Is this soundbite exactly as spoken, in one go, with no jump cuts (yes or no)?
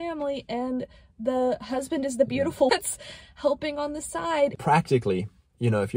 no